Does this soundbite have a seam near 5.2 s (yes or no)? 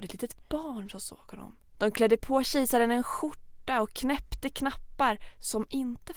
no